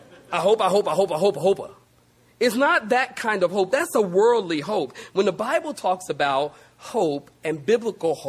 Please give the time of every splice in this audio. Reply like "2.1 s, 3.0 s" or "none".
none